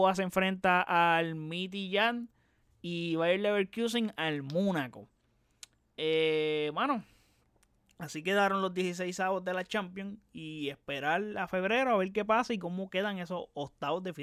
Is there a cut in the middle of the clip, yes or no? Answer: no